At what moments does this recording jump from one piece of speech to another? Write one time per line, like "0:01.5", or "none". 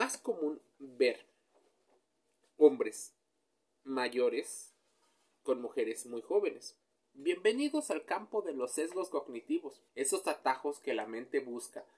0:07.0
0:09.9